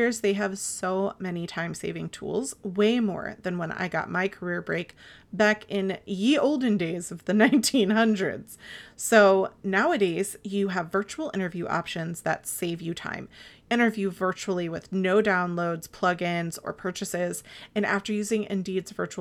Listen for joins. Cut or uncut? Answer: cut